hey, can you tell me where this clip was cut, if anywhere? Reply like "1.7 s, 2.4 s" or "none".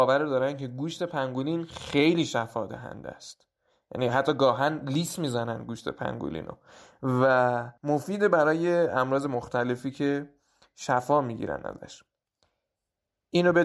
7.8 s